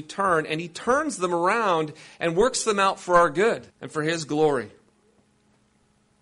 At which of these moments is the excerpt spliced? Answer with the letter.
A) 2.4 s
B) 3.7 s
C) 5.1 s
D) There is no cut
B